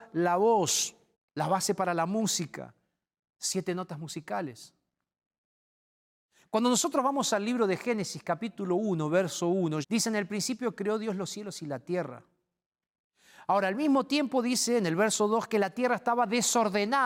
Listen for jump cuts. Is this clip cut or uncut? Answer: cut